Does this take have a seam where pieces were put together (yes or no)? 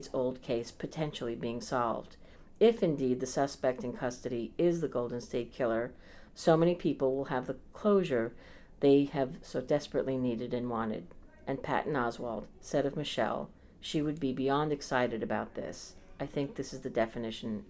yes